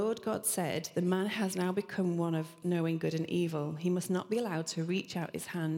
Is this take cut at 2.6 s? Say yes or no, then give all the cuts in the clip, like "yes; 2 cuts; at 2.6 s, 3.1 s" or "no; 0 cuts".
yes; 1 cut; at 2.6 s